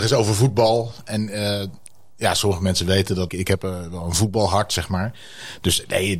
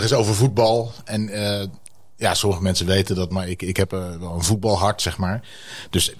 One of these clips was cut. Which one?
first; 1 cut; at 3.3 s

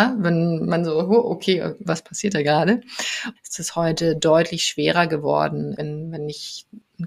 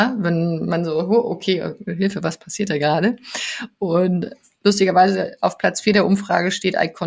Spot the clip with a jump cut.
first; 3 cuts; at 1.8 s, 3.4 s, 5.8 s

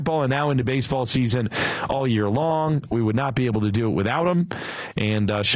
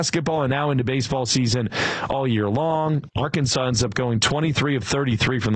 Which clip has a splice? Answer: second; 1 cut; at 3.1 s

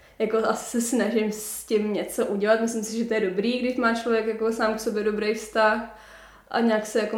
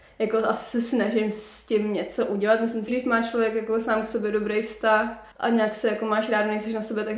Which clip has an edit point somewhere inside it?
second; 2 cuts; at 2.9 s, 5.3 s

